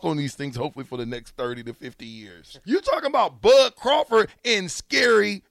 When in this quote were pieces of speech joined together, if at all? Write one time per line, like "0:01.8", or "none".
0:02.6